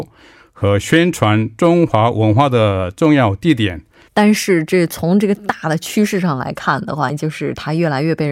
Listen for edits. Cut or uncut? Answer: cut